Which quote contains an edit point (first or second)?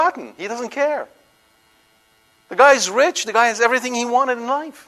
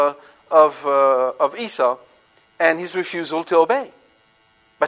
second